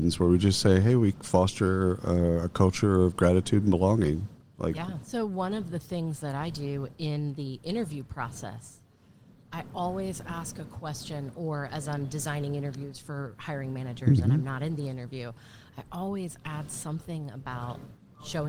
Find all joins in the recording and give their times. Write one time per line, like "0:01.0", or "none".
0:05.0